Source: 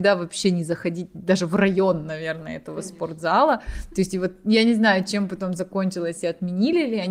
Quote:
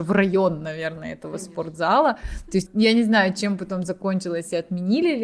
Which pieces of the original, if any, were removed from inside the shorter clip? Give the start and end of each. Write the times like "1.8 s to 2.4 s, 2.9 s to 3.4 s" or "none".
4.1 s to 4.4 s